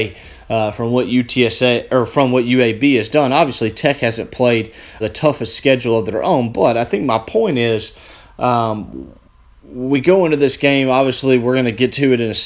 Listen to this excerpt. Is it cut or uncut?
cut